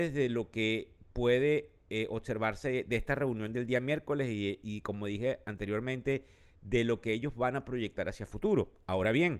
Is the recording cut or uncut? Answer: uncut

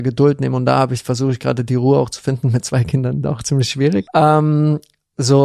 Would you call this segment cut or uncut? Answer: cut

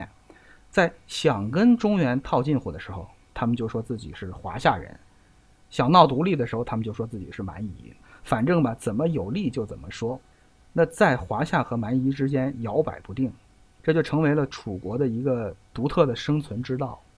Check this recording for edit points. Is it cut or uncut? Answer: uncut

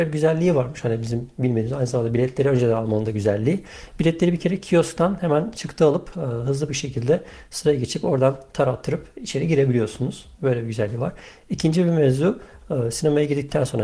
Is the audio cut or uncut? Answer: uncut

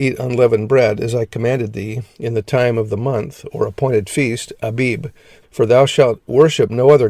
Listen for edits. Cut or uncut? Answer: cut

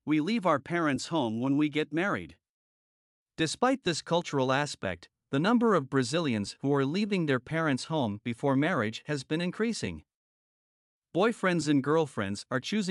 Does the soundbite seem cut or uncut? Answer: uncut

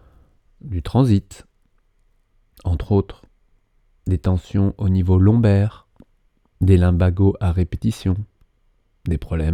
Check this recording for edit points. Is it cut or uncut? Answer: uncut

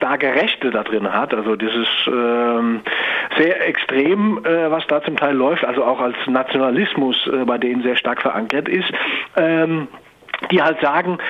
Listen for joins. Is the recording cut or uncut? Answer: uncut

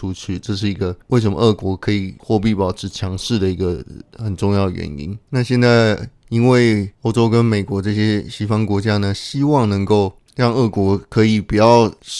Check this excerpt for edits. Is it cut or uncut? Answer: uncut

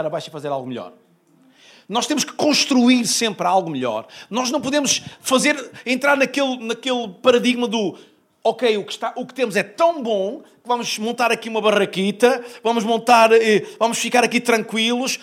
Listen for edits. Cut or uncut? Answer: uncut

